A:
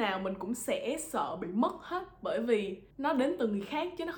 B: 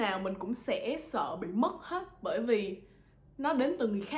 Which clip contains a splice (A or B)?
A